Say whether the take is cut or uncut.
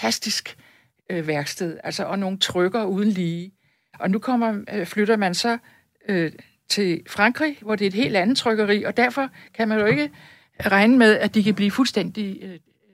uncut